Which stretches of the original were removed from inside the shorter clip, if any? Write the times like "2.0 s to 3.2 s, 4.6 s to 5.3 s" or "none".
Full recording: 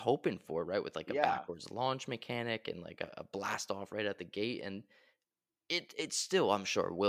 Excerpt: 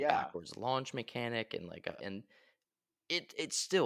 3.1 s to 4.6 s